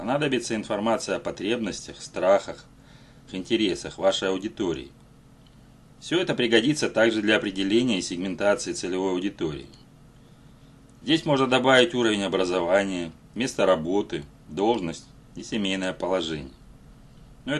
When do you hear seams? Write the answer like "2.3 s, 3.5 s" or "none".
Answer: 3.3 s